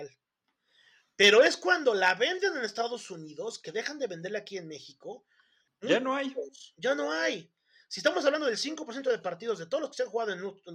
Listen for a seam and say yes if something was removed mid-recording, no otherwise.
yes